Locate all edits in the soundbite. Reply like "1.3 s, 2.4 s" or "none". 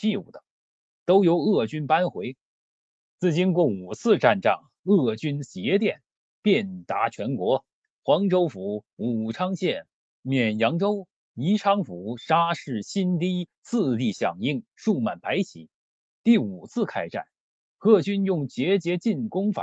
3.1 s, 16.1 s